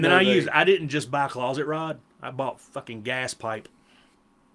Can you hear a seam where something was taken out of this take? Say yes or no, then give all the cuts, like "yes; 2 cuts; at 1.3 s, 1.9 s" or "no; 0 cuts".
no; 0 cuts